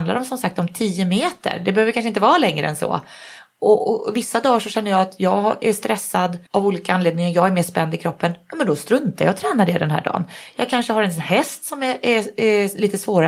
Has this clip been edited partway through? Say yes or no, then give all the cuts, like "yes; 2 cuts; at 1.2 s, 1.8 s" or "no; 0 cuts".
yes; 1 cut; at 6.5 s